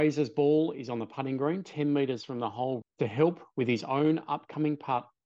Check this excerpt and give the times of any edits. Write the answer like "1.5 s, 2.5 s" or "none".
2.8 s